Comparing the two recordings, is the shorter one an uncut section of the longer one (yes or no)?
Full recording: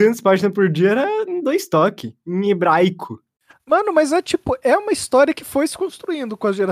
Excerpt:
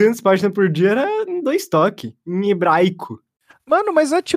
yes